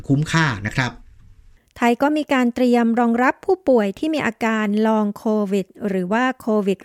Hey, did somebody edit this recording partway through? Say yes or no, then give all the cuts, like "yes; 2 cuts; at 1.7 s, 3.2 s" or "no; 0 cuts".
no; 0 cuts